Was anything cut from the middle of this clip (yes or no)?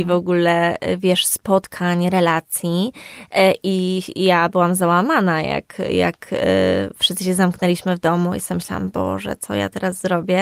no